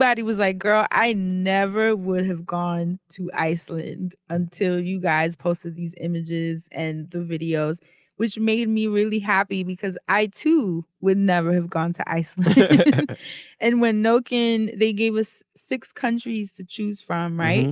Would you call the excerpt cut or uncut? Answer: uncut